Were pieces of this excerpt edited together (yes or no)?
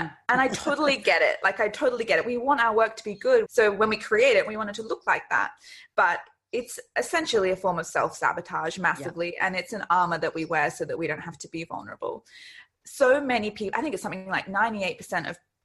yes